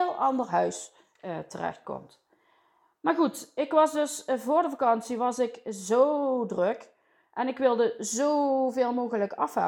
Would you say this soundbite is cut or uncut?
uncut